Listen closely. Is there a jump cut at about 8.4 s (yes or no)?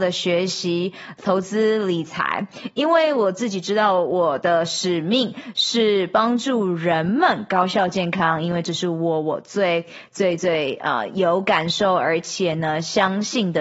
no